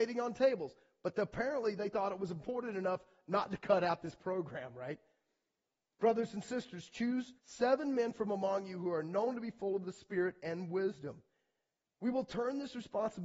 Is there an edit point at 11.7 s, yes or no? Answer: no